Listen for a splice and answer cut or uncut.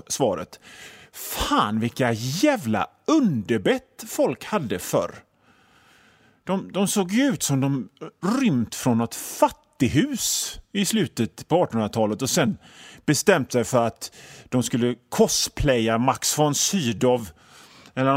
uncut